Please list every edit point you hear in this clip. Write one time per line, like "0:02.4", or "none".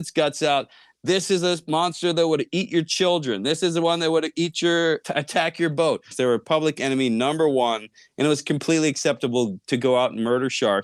0:05.0
0:06.1